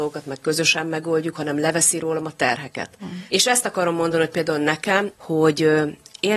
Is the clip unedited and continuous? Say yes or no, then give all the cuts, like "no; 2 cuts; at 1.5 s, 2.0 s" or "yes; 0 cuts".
no; 2 cuts; at 3.3 s, 5.1 s